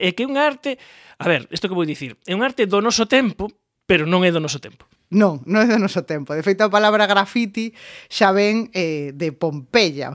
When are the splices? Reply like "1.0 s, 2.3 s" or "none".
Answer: none